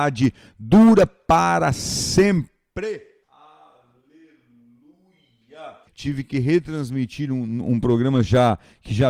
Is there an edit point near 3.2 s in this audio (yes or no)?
yes